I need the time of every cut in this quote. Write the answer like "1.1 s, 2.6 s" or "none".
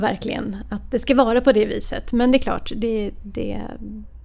none